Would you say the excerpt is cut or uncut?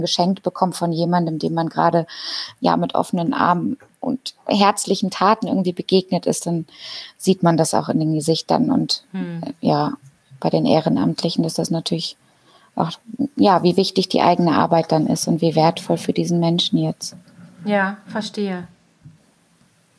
uncut